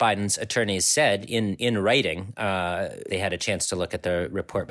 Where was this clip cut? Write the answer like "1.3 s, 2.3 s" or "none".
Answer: 3.1 s